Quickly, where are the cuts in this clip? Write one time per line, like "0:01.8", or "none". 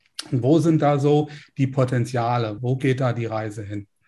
none